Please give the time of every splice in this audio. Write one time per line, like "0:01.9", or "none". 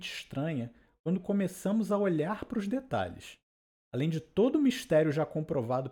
none